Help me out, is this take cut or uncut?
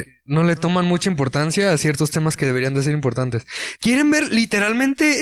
cut